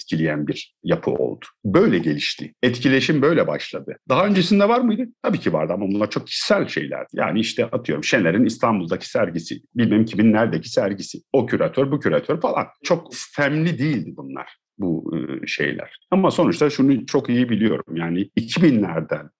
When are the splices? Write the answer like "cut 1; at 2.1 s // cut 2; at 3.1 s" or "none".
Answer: none